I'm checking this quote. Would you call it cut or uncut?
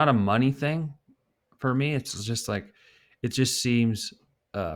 uncut